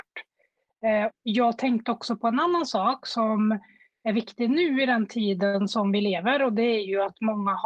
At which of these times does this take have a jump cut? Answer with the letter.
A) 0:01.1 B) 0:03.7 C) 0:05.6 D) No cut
A